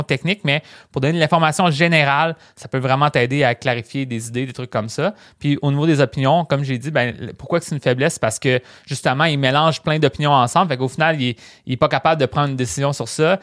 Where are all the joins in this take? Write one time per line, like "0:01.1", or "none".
none